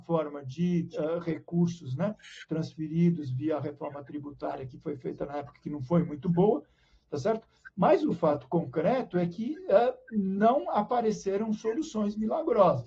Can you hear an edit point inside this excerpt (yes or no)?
no